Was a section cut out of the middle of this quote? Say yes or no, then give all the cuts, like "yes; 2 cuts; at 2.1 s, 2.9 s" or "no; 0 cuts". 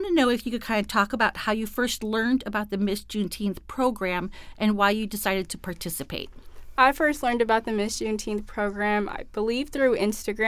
no; 0 cuts